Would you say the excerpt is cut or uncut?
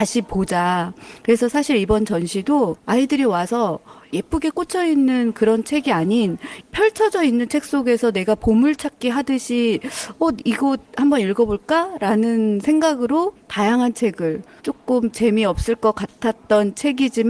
uncut